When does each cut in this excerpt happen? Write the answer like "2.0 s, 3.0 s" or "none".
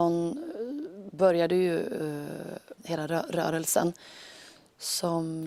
2.8 s